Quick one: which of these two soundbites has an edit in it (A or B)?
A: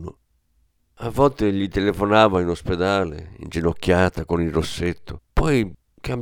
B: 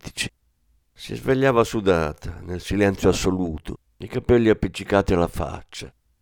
A